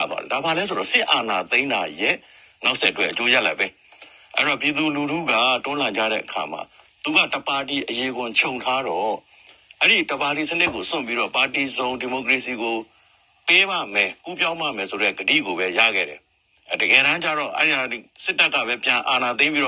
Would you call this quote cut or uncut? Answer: uncut